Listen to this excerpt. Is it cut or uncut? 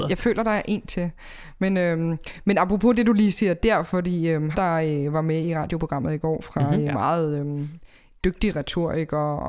cut